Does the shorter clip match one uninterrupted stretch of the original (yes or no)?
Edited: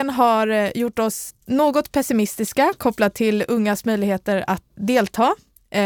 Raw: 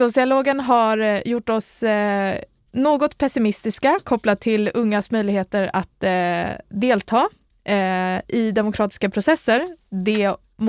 no